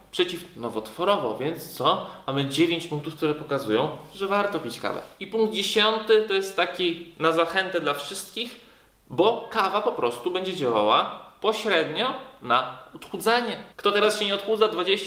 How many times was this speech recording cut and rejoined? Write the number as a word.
one